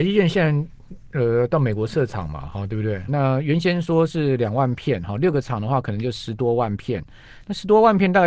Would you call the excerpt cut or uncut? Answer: cut